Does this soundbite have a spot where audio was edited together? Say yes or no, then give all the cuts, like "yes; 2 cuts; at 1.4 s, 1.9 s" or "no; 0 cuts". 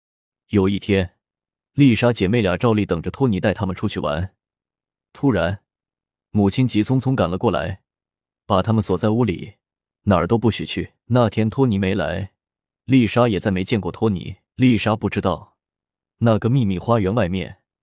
yes; 2 cuts; at 11.0 s, 14.5 s